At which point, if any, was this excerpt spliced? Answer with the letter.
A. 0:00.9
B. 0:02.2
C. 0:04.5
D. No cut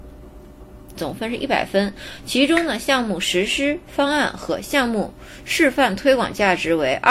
A